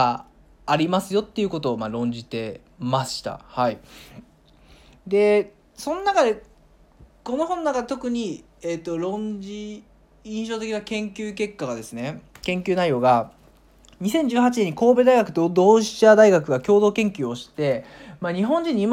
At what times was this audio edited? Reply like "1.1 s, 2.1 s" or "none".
none